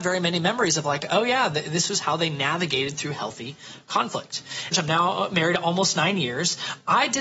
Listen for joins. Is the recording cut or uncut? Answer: cut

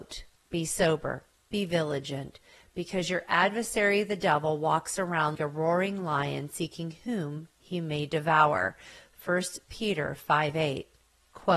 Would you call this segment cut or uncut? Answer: cut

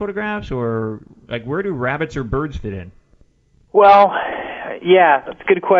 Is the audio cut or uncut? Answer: uncut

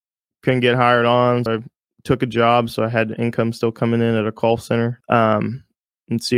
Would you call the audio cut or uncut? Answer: cut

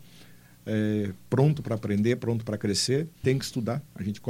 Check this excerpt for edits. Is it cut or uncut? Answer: cut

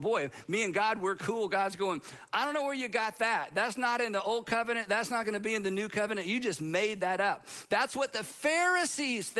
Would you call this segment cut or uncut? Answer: uncut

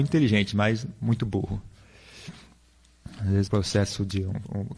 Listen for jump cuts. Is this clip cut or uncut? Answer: cut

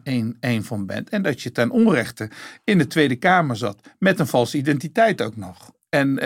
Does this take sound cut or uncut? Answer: uncut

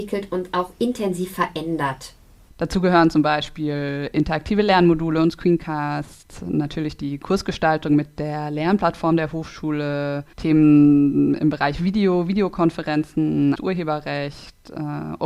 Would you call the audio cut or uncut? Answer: cut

